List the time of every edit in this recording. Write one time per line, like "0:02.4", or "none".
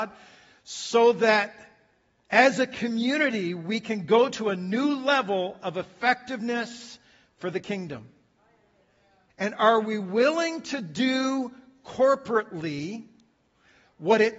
0:09.3